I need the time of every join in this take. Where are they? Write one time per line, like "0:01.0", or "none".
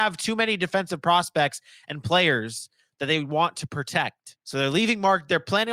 0:04.4